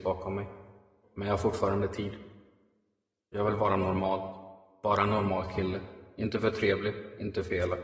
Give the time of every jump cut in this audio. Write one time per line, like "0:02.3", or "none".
0:01.0